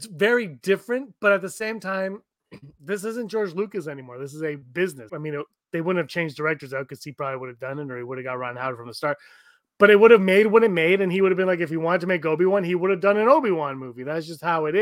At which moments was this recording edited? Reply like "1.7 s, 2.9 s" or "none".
5.1 s